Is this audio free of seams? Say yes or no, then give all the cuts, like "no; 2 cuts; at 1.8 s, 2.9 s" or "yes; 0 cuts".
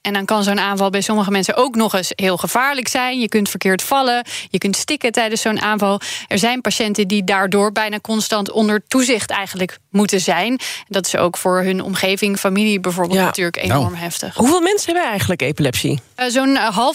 yes; 0 cuts